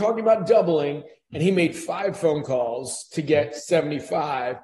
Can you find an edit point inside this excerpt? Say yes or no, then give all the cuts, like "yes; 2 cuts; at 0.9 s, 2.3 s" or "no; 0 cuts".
no; 0 cuts